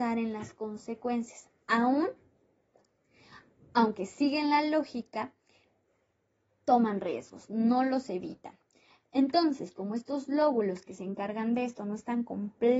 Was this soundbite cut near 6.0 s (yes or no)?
no